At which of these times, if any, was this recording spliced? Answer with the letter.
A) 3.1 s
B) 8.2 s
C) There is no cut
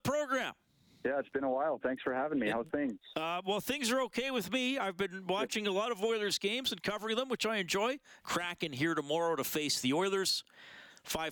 B